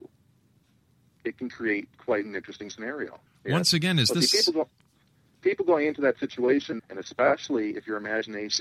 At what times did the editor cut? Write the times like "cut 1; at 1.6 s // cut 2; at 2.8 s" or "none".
cut 1; at 3.3 s // cut 2; at 6.8 s